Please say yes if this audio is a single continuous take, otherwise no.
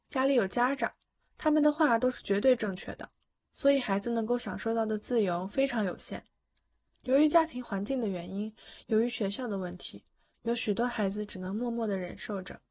yes